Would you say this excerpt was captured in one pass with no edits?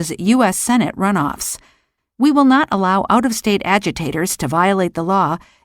no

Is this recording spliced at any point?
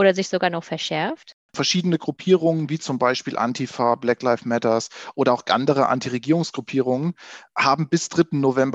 yes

